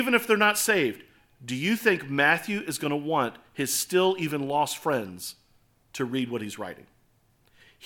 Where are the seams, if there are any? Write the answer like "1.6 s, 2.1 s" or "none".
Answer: none